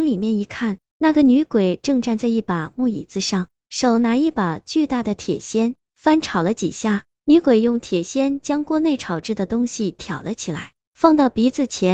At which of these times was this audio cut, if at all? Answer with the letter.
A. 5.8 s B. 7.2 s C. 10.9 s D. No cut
A